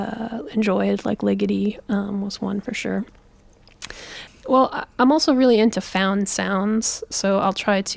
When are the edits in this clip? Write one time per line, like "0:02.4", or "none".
0:04.3